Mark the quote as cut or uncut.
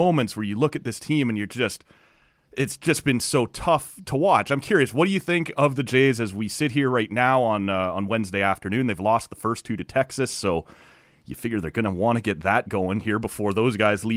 uncut